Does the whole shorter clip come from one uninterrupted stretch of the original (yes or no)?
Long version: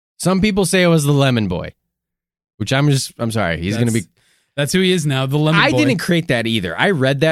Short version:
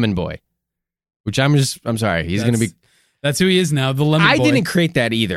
yes